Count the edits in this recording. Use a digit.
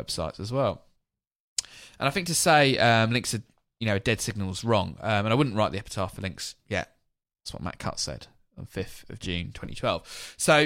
0